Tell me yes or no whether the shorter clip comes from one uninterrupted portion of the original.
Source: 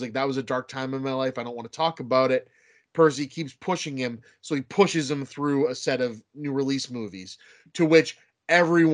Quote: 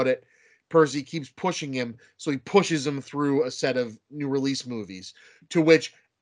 yes